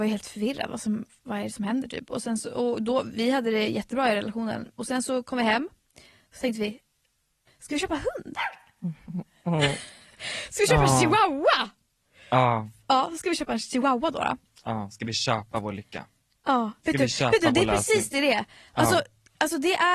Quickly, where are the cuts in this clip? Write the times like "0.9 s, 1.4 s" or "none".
none